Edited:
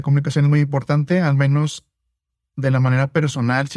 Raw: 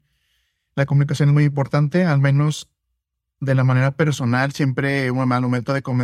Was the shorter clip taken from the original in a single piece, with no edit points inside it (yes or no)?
yes